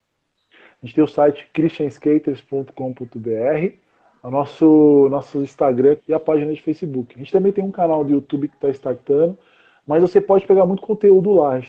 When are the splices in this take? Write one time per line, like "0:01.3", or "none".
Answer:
0:06.0